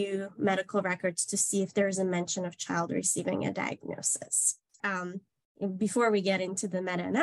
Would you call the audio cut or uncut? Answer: cut